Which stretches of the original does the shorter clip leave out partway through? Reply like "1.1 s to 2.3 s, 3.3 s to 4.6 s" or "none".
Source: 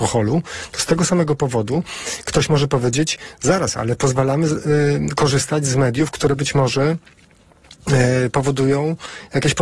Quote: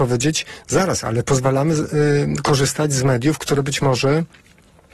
none